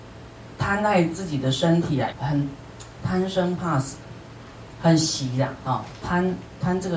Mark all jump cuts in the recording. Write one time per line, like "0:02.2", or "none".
0:02.1